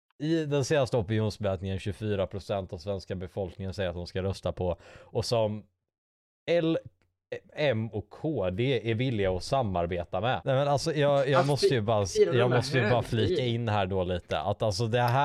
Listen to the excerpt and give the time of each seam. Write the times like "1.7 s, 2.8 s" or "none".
10.4 s